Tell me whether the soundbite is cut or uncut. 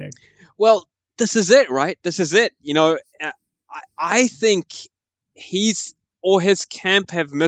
uncut